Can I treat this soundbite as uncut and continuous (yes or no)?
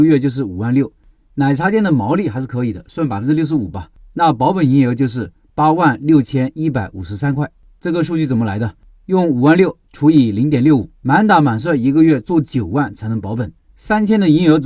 no